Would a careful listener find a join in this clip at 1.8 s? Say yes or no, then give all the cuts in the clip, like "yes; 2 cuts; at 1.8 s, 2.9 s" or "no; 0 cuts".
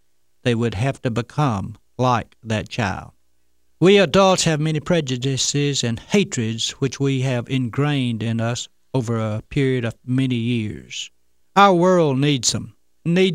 no; 2 cuts; at 3.7 s, 11.4 s